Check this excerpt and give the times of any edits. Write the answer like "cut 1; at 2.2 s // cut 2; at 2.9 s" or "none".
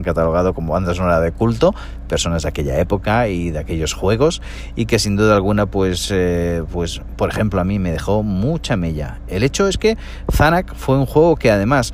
none